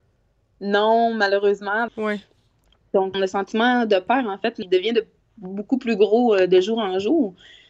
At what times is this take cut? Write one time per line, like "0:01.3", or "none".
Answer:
0:01.9
0:03.1
0:04.6